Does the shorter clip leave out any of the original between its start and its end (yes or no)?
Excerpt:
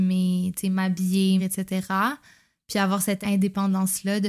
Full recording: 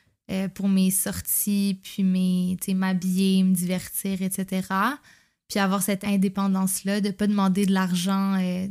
yes